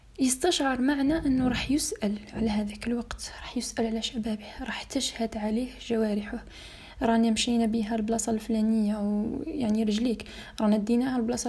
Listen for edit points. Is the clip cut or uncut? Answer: uncut